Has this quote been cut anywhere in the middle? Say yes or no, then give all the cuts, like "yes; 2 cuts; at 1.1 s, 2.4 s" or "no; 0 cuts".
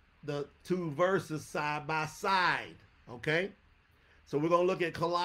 no; 0 cuts